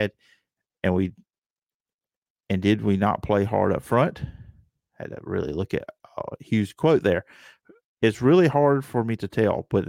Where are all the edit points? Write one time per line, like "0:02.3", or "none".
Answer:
none